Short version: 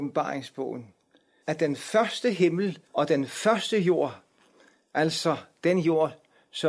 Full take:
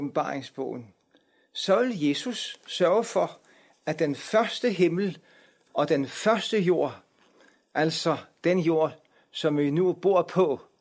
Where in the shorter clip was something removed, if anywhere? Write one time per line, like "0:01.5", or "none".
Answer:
0:01.4
0:02.8